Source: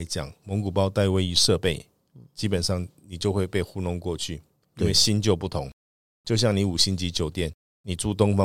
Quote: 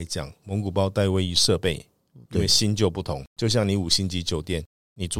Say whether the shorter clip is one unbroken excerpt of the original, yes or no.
no